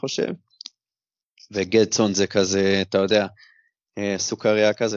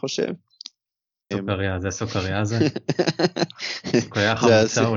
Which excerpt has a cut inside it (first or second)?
second